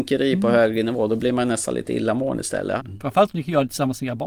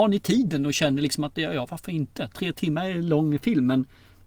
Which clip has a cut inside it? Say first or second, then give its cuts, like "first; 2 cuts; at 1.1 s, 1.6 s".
first; 1 cut; at 2.8 s